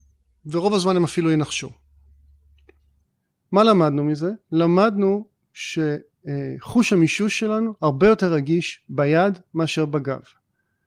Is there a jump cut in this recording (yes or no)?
no